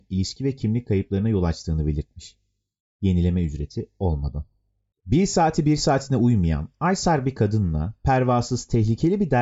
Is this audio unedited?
yes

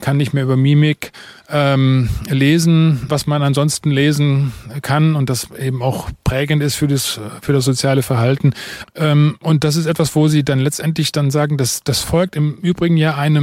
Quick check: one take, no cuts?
no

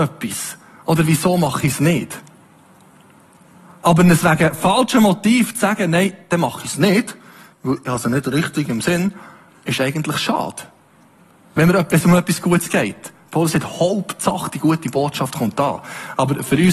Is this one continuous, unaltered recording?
yes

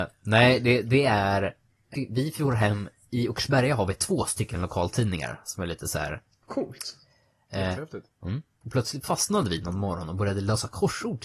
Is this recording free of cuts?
no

